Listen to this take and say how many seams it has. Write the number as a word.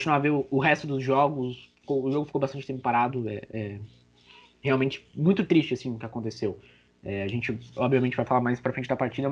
zero